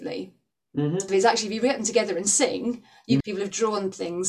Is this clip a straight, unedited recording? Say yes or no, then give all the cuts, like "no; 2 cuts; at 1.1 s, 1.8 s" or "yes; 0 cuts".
no; 2 cuts; at 1.1 s, 3.2 s